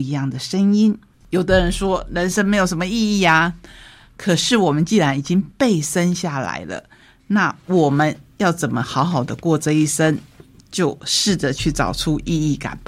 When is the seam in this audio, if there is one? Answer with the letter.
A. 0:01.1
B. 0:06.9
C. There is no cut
A